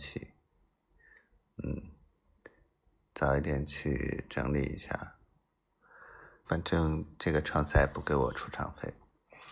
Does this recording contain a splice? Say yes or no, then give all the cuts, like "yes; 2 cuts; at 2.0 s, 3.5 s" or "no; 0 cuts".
yes; 1 cut; at 6.4 s